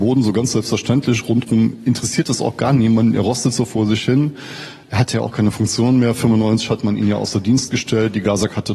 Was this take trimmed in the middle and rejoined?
no; 0 cuts

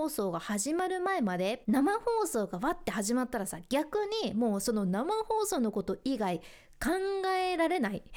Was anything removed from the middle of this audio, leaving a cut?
yes; 1 cut; at 1.6 s

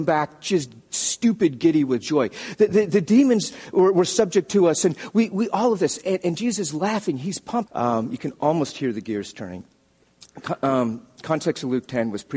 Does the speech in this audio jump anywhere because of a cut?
yes; 1 cut; at 7.7 s

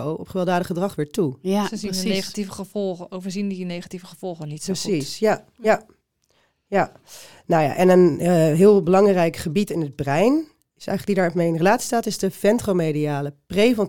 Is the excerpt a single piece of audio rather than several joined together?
yes; 0 cuts

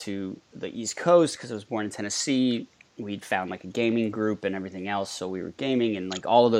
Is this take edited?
no; 0 cuts

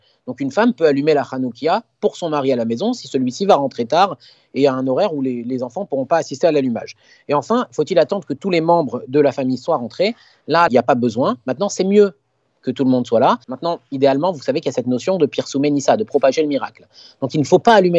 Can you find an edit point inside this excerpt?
yes; 2 cuts; at 10.7 s, 13.4 s

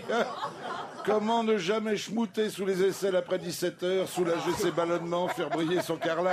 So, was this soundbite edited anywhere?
no; 0 cuts

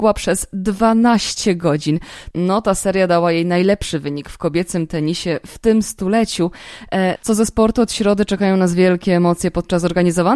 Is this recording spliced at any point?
yes; 2 cuts; at 2.3 s, 7.2 s

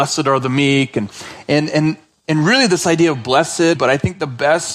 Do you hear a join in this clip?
yes; 1 cut; at 3.7 s

